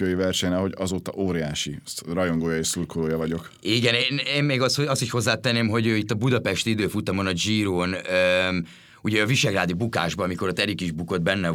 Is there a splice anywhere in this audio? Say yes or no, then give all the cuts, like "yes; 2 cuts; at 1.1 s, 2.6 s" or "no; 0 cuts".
no; 0 cuts